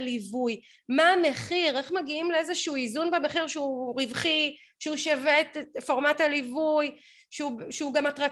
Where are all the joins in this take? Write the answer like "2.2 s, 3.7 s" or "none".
none